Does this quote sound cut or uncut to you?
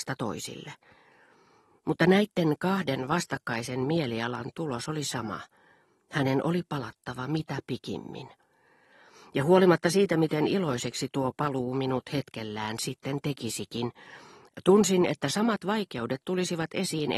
uncut